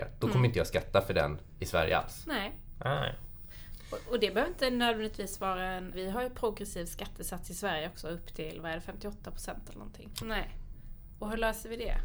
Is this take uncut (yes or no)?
no